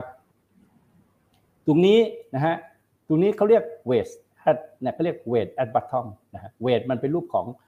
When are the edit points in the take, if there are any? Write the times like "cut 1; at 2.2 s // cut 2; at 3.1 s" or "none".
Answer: none